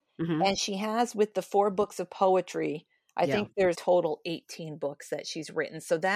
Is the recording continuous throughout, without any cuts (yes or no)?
no